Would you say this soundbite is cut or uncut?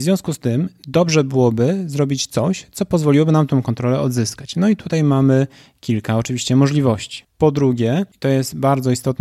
cut